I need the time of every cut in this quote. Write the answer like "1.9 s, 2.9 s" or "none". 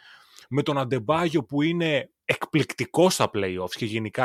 none